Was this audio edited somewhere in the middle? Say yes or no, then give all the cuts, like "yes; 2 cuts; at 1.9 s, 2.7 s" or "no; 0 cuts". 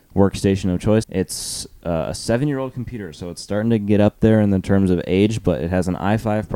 yes; 1 cut; at 1.0 s